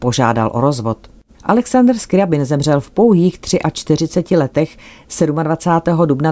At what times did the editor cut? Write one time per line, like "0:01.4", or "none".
0:01.3